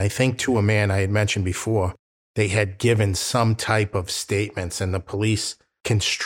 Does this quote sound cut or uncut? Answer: uncut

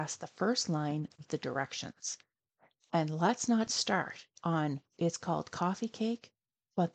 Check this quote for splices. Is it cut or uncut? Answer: cut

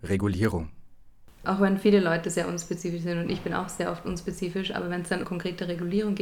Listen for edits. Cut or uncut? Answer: cut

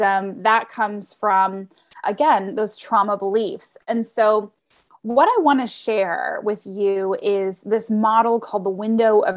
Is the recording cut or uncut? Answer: cut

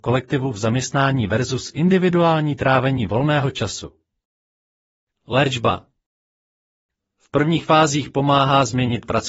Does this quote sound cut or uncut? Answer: uncut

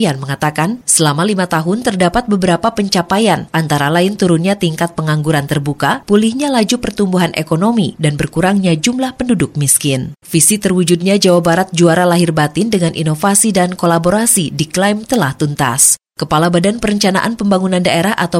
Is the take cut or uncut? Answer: cut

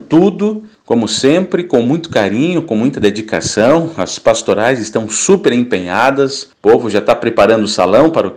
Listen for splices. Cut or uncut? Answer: uncut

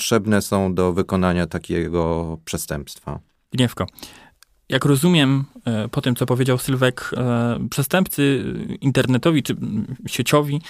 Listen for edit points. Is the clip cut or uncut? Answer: uncut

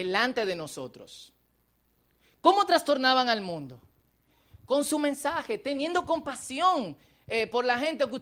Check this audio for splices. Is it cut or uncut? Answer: uncut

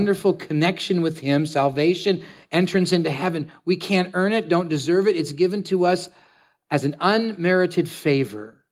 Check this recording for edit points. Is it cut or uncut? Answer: uncut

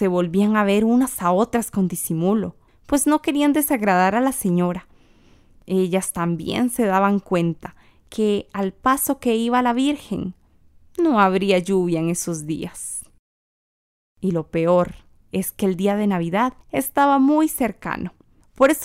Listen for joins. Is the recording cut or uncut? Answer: uncut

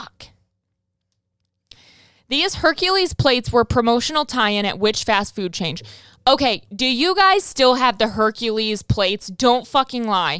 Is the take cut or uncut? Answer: uncut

